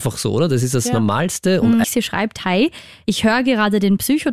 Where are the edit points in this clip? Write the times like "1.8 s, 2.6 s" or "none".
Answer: 1.8 s